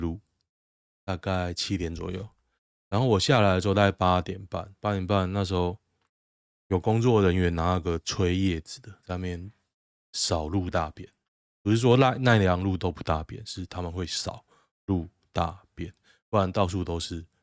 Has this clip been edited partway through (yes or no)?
no